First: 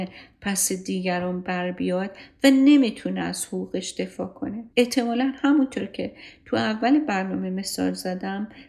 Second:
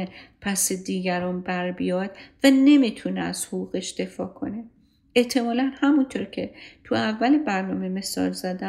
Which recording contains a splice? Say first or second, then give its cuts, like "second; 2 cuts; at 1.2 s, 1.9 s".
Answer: first; 1 cut; at 4.7 s